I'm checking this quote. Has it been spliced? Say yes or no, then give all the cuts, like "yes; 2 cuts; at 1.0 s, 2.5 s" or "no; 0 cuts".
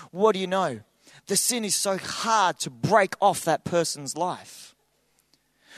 no; 0 cuts